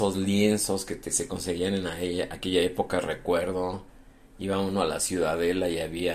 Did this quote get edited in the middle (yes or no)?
no